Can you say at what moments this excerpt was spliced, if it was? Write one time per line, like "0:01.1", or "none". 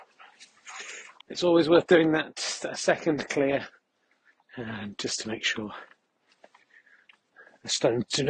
0:01.2
0:04.4